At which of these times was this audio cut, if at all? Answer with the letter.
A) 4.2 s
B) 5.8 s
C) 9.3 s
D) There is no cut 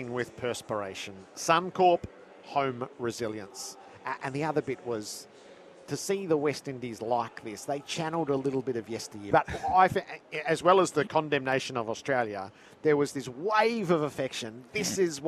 C